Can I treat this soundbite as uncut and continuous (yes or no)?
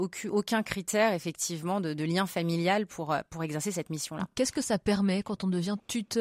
yes